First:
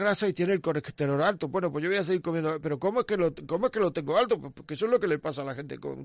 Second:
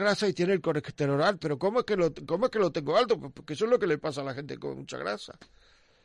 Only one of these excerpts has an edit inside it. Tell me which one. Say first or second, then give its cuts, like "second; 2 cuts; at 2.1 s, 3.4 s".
second; 1 cut; at 1.4 s